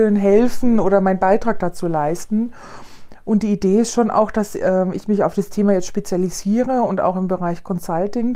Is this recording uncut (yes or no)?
yes